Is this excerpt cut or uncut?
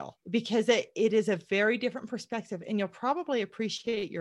uncut